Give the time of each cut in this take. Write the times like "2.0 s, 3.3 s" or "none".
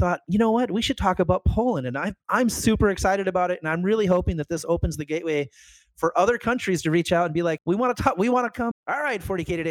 7.6 s, 8.7 s

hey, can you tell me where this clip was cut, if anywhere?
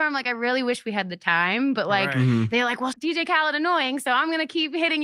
2.9 s

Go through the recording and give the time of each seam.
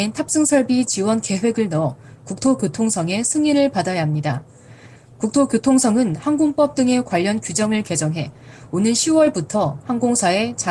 5.0 s

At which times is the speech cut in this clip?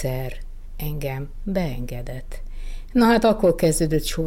2.9 s

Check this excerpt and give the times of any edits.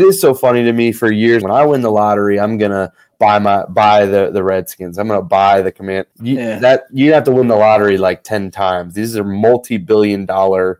1.4 s, 6.1 s

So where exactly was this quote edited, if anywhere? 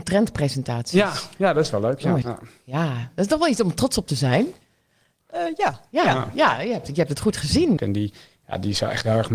2.2 s, 7.8 s

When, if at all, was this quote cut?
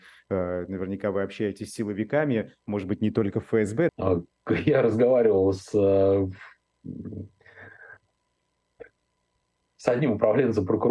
3.9 s

